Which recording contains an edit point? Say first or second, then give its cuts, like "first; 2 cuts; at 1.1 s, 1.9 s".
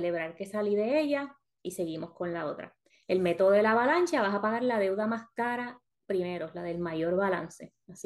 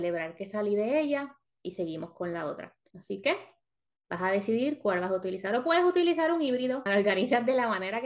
second; 2 cuts; at 2.9 s, 6.9 s